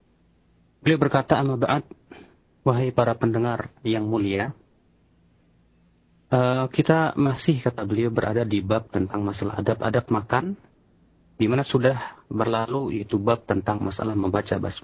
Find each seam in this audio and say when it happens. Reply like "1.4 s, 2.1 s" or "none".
none